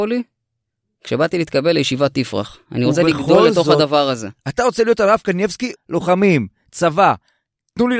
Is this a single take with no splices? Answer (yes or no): no